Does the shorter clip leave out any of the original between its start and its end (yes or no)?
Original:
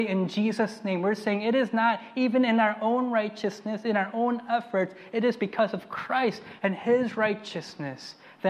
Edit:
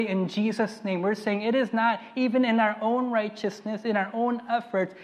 no